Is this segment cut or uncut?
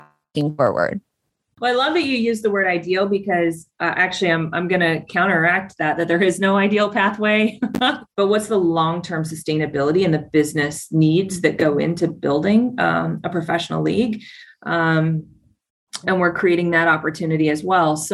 cut